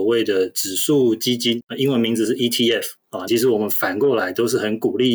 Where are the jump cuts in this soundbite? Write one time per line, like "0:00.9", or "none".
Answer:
0:03.3